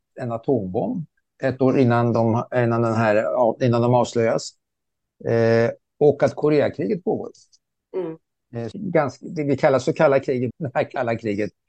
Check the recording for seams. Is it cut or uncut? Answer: cut